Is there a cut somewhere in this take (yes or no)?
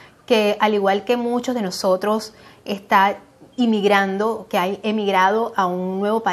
yes